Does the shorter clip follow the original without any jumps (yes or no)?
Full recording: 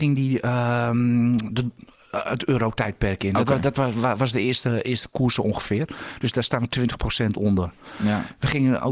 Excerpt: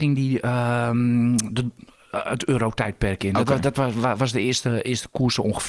yes